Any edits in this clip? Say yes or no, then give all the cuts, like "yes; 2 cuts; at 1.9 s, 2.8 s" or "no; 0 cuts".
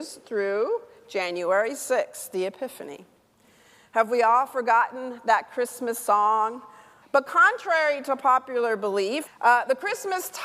yes; 2 cuts; at 7.0 s, 9.3 s